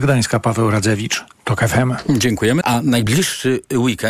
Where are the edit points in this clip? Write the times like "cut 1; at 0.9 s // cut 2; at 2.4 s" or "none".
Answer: cut 1; at 2.6 s